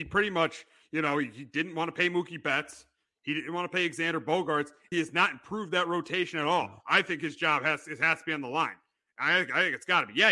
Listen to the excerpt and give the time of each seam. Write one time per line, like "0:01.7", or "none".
0:04.9